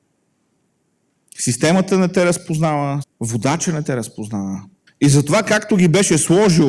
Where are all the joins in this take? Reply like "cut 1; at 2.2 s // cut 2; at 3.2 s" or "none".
cut 1; at 3.0 s // cut 2; at 4.9 s